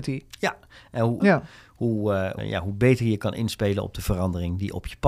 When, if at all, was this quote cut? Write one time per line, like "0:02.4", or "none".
0:01.2
0:02.4